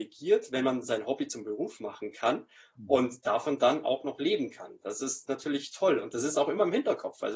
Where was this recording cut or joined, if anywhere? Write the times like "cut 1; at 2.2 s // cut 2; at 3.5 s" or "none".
none